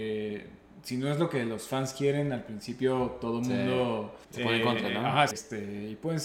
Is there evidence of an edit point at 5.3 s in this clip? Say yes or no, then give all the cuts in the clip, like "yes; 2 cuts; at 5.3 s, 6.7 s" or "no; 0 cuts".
yes; 2 cuts; at 4.2 s, 5.3 s